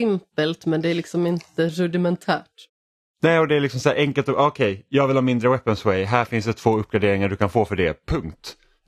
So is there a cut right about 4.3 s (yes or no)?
no